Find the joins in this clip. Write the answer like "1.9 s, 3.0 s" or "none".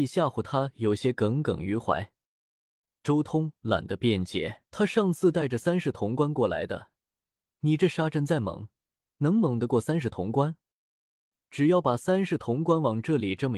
4.7 s